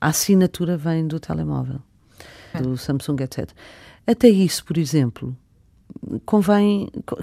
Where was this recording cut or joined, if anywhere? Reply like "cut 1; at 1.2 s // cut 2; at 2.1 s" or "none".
cut 1; at 2.5 s